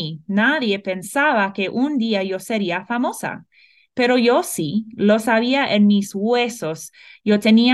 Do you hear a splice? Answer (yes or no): no